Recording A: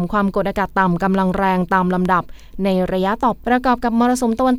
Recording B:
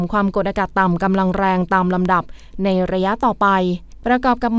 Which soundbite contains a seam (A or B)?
A